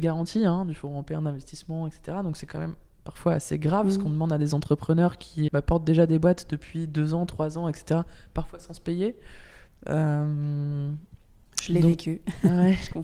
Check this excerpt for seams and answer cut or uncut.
cut